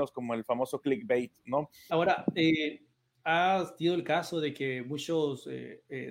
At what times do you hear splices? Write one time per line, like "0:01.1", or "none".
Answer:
0:01.9

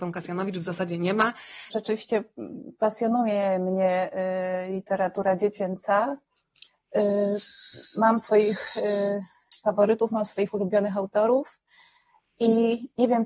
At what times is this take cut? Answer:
0:01.7

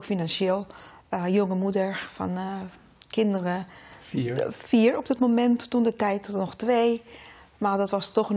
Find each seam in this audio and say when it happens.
none

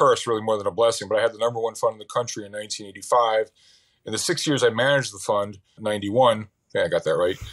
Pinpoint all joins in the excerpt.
0:05.8

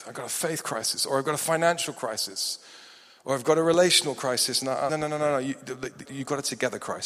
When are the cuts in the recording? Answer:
0:04.9
0:06.1

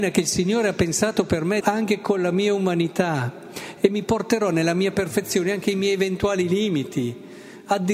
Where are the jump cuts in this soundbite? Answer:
0:01.6

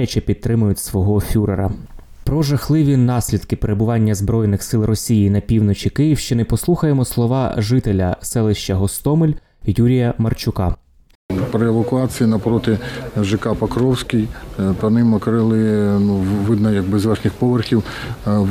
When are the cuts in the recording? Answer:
none

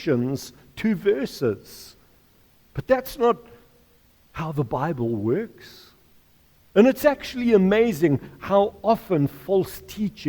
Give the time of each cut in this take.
0:06.7

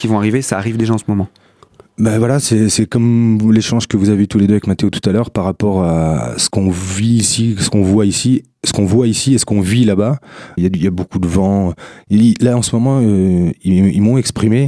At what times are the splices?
0:10.6

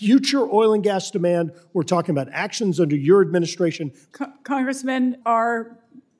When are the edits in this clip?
0:04.1
0:05.2

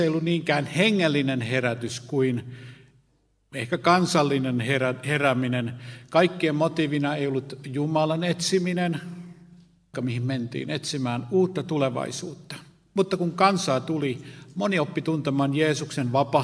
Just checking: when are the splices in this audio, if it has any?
0:09.9

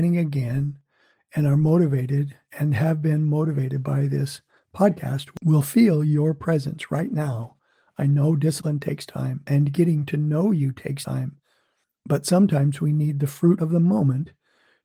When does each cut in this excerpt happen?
none

